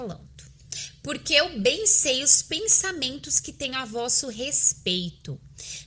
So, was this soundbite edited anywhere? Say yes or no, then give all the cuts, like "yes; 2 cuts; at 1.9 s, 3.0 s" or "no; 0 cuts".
no; 0 cuts